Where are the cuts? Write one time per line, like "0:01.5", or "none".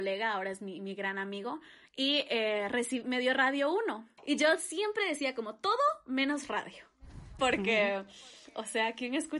0:04.2
0:07.4